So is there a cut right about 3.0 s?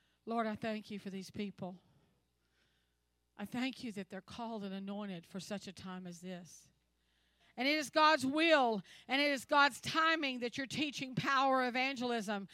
no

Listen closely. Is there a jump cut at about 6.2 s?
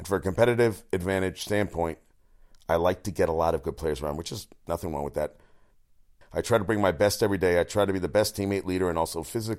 yes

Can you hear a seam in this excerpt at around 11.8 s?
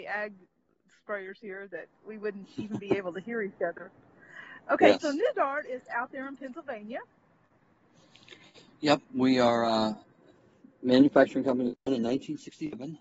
yes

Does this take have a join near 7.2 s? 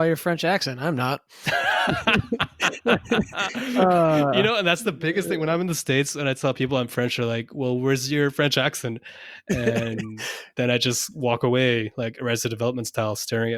no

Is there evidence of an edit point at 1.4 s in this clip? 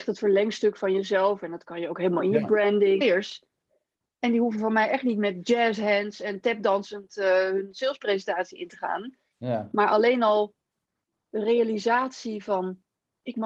no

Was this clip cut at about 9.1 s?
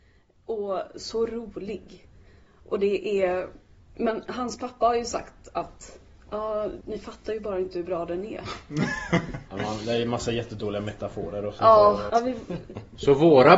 no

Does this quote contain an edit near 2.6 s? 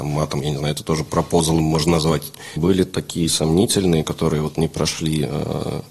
yes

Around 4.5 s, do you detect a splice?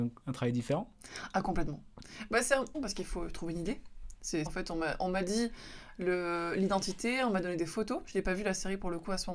yes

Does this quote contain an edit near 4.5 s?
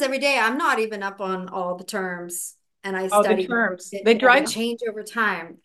yes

